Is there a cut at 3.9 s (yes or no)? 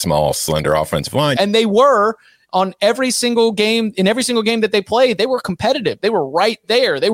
no